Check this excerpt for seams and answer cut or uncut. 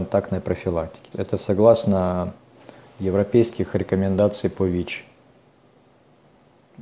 cut